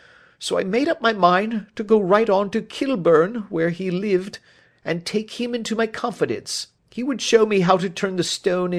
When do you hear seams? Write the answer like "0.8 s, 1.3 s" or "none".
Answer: 6.8 s

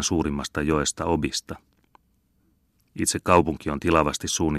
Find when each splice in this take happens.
none

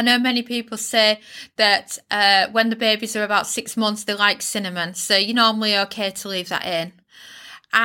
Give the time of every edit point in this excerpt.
none

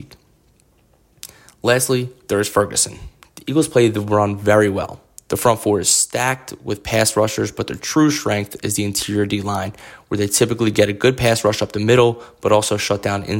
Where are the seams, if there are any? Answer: 3.2 s

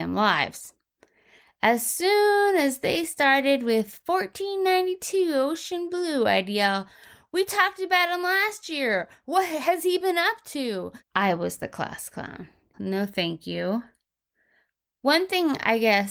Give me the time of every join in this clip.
11.0 s, 12.7 s

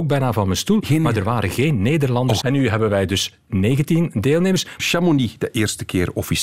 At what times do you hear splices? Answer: 2.4 s, 4.8 s

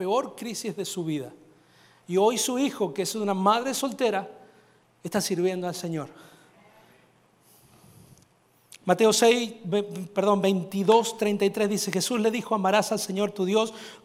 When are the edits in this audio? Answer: none

